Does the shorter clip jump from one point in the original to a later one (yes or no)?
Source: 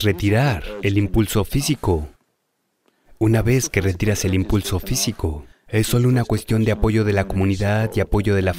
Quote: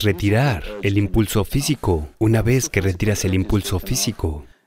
yes